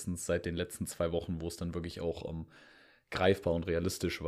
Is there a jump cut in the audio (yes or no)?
no